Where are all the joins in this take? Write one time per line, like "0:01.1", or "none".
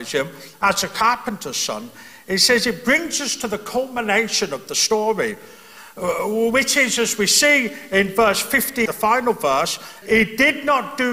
0:08.9
0:10.0

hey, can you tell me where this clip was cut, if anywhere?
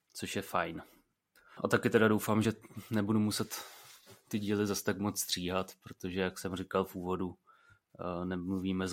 none

